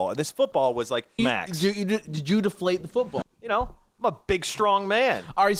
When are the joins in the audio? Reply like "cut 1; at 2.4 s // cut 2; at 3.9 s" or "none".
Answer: cut 1; at 1.2 s // cut 2; at 3.2 s